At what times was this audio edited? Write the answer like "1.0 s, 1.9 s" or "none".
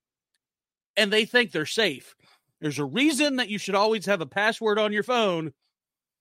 none